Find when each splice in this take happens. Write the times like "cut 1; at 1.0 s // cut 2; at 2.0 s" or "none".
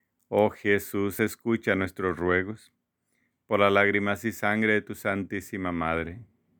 none